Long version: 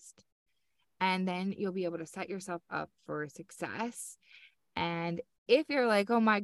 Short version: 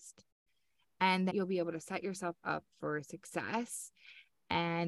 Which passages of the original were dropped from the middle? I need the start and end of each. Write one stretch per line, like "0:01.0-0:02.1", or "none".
0:01.3-0:01.6